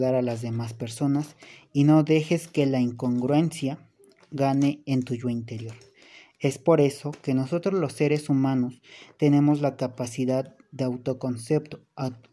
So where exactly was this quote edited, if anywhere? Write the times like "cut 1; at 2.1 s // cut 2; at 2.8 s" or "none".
none